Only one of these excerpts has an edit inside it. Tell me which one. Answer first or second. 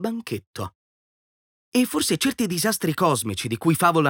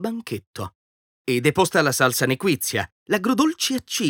second